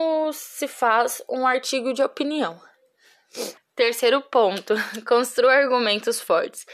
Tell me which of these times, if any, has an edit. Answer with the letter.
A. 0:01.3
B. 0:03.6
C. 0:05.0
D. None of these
B